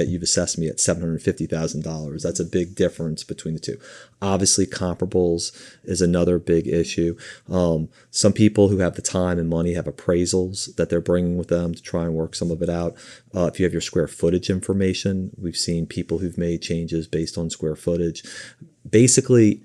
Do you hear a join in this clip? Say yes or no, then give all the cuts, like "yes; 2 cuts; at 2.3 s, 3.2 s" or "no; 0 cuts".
no; 0 cuts